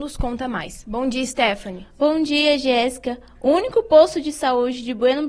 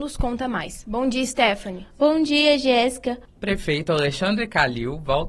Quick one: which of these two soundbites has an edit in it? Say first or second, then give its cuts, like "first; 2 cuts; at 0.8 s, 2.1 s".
second; 1 cut; at 3.3 s